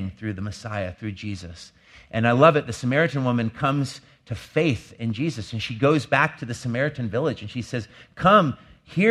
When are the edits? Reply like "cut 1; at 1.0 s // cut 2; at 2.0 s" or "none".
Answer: none